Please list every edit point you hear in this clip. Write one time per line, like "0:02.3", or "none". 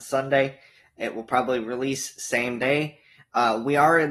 none